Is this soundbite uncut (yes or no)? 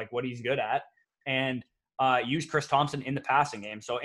yes